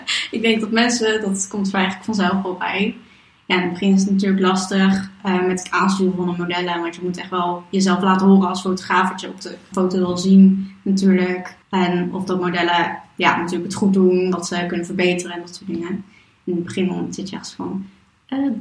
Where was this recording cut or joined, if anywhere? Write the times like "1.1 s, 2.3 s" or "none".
9.7 s, 11.6 s